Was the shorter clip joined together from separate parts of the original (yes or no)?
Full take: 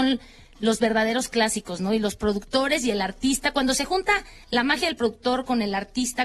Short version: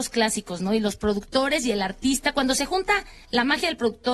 no